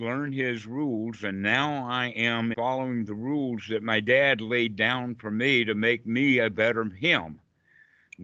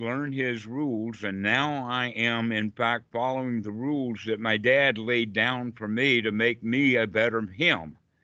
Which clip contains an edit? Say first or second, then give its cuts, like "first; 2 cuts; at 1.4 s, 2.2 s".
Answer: first; 1 cut; at 2.5 s